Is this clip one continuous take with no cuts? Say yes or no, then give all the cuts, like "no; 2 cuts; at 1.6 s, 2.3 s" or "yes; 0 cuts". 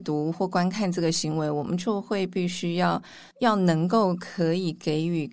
no; 1 cut; at 3.3 s